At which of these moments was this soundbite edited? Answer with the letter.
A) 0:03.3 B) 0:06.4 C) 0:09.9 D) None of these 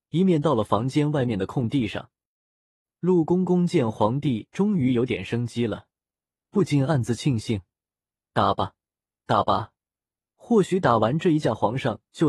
D